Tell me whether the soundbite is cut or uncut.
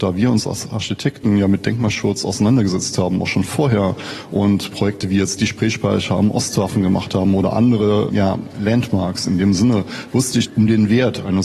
uncut